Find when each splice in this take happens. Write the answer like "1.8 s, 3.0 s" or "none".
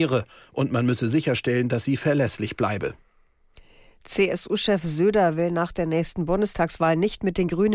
none